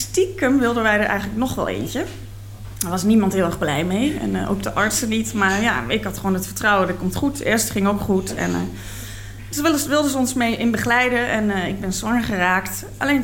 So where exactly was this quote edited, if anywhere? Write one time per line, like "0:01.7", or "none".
none